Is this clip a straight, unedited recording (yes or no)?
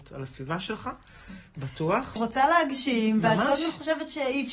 no